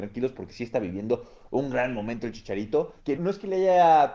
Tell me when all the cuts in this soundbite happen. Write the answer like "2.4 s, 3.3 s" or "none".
3.2 s